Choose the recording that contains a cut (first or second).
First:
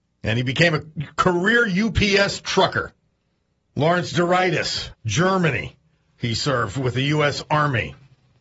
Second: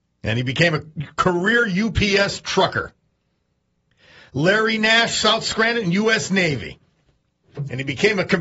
first